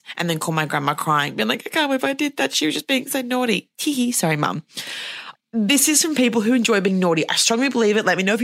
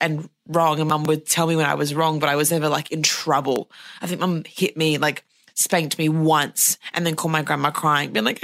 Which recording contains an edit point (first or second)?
first